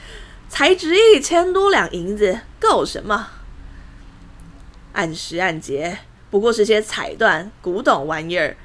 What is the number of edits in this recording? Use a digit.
1